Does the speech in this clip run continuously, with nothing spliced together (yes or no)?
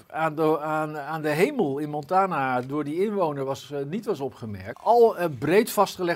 no